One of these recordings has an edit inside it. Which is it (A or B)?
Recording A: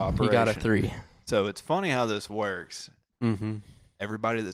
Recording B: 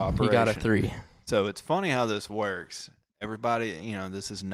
A